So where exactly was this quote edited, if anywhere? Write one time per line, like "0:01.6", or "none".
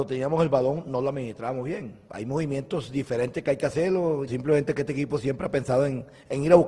0:02.0
0:04.3